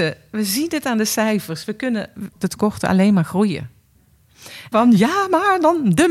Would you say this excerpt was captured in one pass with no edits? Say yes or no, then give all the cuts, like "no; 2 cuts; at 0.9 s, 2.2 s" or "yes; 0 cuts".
no; 2 cuts; at 2.3 s, 4.7 s